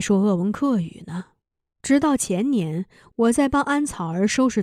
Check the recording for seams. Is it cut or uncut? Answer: cut